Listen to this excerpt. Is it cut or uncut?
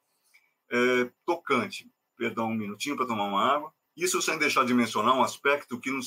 uncut